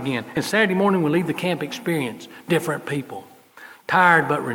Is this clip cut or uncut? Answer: uncut